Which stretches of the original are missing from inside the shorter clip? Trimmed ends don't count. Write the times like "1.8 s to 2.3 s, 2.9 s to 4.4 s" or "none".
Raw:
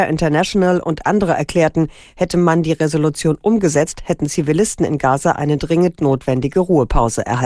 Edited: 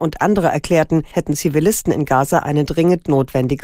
2.0 s to 4.0 s

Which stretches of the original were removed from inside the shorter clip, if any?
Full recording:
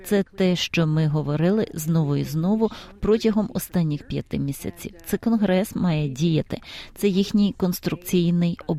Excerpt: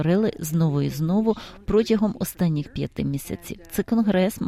none

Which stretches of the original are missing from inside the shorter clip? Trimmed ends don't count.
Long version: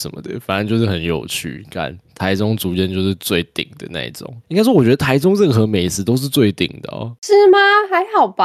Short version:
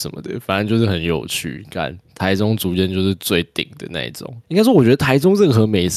none

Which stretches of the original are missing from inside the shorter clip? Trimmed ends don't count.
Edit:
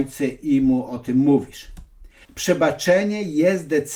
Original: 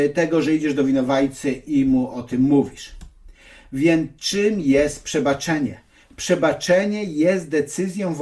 3.5 s to 6.1 s

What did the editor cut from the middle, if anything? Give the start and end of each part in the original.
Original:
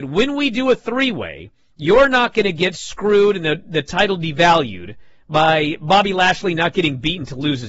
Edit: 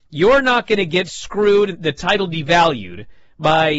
3.4 s to 3.6 s

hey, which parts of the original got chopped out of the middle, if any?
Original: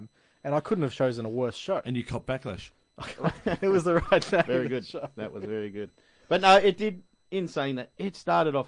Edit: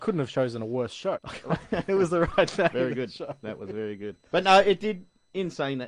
1.8 s to 2.9 s, 6.0 s to 6.2 s

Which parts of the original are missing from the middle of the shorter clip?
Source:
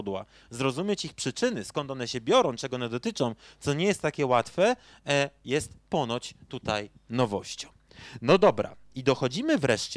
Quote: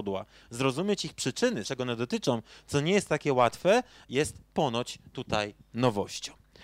1.6 s to 2.6 s, 5.0 s to 5.4 s

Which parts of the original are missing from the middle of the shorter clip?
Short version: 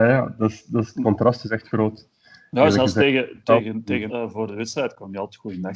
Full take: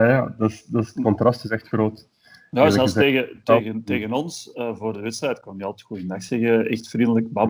4.1 s to 4.5 s

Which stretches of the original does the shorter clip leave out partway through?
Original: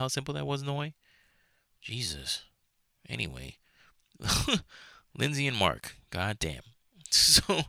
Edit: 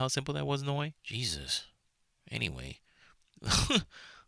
1.0 s to 1.8 s

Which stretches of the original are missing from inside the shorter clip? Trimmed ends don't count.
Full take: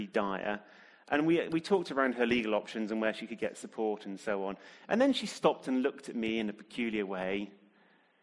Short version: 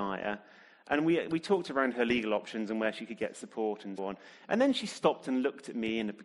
4.2 s to 4.4 s

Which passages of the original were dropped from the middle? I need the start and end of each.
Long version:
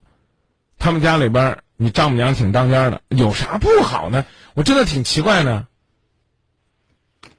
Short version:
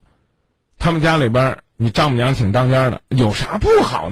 none

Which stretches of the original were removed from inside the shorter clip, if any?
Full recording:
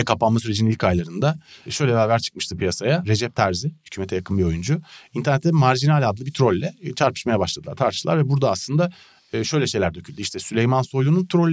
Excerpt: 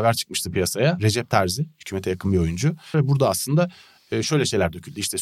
5.0 s to 8.2 s

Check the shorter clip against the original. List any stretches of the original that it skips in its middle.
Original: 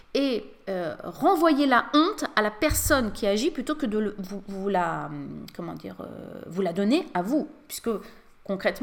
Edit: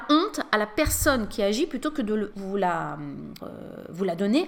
4.2 s to 4.4 s, 5.5 s to 6.0 s

